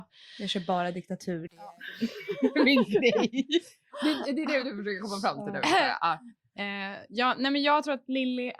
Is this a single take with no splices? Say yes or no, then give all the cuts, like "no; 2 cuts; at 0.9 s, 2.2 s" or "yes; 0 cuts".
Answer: yes; 0 cuts